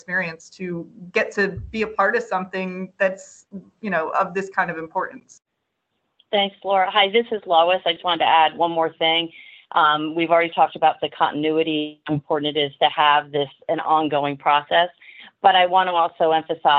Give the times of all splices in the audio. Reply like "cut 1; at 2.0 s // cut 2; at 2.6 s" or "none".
cut 1; at 8.0 s